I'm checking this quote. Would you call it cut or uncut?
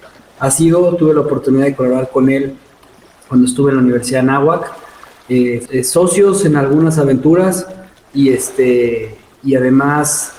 cut